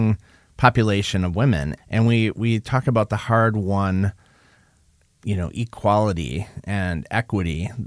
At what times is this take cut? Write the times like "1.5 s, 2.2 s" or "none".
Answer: 1.8 s